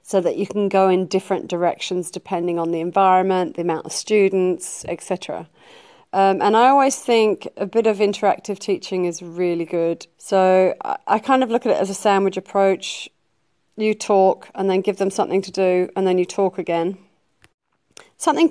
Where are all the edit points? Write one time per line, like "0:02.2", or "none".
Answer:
0:10.1